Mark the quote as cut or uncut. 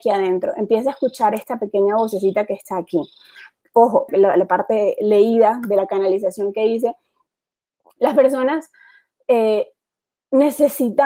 cut